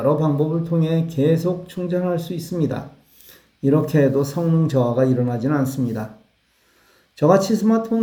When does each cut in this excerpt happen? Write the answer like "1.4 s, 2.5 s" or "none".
none